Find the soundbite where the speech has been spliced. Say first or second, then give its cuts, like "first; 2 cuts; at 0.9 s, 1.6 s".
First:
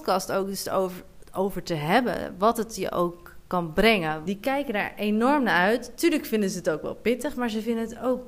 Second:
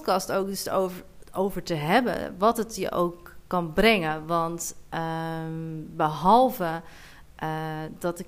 first; 1 cut; at 4.3 s